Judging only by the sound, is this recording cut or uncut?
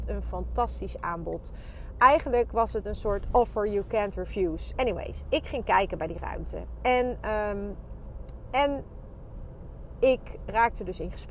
cut